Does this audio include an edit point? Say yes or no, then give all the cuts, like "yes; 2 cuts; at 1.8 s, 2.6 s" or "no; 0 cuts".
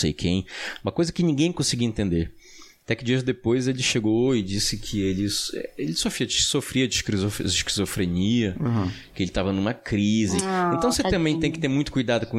no; 0 cuts